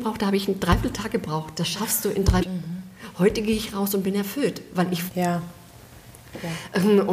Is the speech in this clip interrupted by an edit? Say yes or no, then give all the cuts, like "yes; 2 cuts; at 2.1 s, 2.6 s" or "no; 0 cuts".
yes; 2 cuts; at 2.4 s, 5.1 s